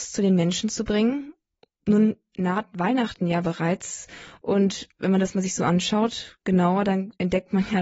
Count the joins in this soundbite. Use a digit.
0